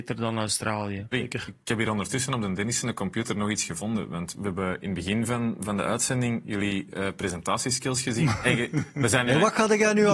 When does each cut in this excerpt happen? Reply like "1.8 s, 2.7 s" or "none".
1.1 s